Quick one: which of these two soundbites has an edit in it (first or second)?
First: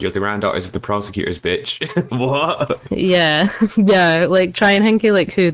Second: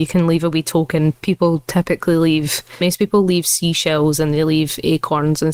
first